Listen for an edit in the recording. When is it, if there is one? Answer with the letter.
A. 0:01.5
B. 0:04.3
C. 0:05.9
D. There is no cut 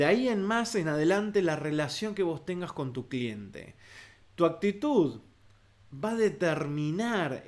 D